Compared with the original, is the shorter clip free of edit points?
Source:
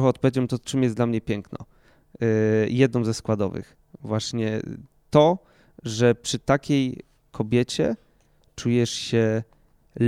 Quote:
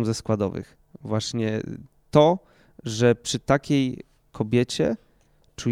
yes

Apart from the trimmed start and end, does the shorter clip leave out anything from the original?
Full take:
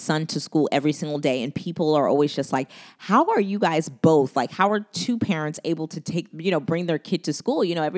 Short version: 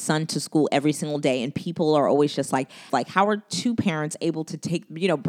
yes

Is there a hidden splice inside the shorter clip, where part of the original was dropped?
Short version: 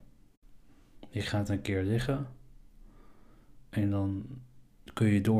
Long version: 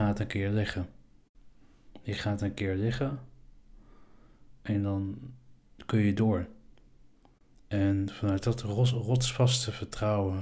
no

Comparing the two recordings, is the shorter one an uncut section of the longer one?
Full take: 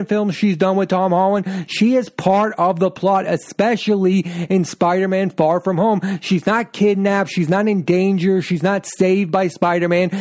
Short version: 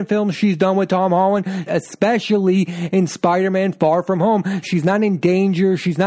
no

